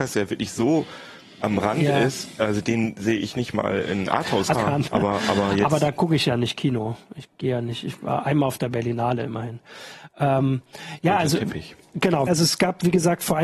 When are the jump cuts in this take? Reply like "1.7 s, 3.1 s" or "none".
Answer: 4.5 s, 12.3 s